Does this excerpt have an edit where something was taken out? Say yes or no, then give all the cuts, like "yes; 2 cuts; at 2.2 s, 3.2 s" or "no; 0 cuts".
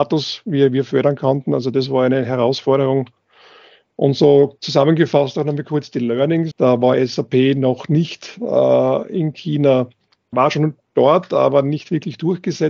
yes; 2 cuts; at 6.5 s, 10.3 s